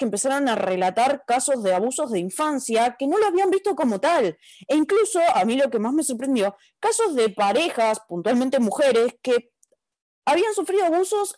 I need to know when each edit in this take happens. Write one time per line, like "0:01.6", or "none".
none